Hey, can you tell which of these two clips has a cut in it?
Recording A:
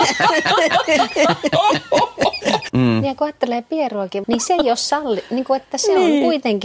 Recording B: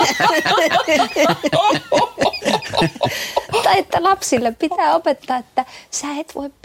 A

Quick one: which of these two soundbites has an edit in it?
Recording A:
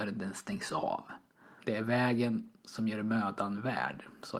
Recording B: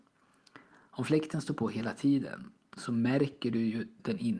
A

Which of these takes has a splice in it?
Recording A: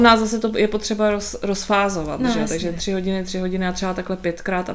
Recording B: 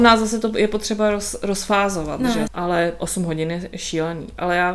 B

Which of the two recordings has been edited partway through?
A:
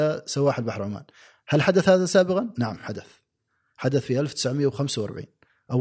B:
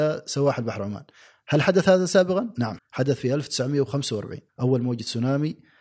B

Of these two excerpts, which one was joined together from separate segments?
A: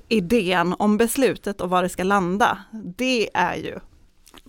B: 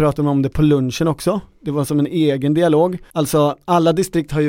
B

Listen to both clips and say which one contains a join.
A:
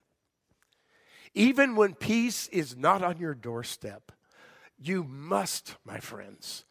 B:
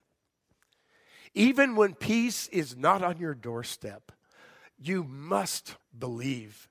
B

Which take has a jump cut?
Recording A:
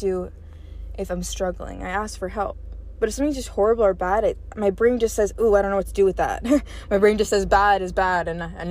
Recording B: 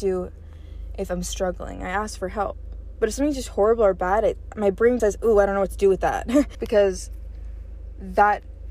B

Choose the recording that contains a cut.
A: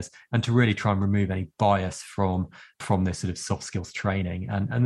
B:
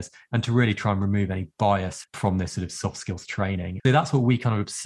B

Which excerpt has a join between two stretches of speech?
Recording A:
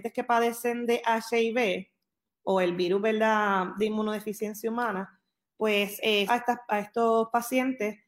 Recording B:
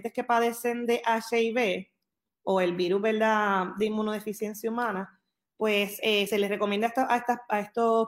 A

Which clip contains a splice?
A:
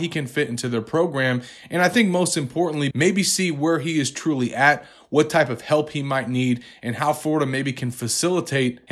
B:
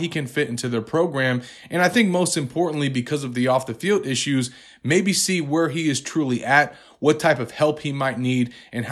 A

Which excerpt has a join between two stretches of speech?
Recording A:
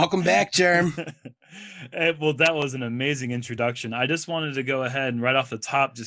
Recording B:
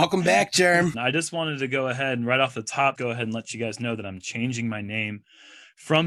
B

